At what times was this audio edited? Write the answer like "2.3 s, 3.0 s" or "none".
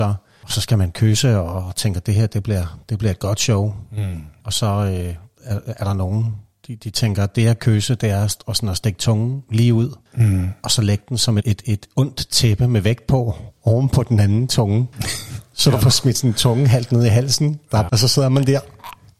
11.4 s, 17.9 s